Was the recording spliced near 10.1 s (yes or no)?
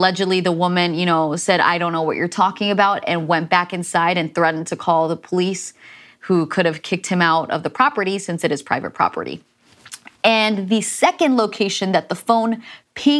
no